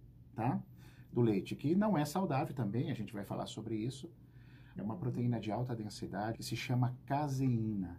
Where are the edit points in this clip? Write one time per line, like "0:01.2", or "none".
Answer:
0:04.8
0:06.3